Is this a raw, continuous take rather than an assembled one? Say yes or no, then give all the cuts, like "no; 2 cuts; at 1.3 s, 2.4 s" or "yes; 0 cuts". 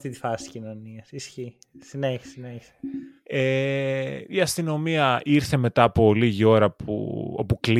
yes; 0 cuts